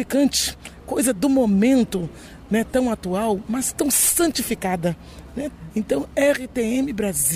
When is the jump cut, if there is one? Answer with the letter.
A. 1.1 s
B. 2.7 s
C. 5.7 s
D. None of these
C